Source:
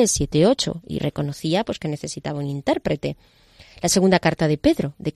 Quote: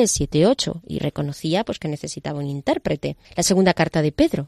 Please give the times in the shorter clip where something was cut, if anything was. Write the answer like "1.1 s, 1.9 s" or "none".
3.2 s